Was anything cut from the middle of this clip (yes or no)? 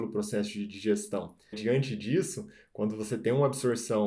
yes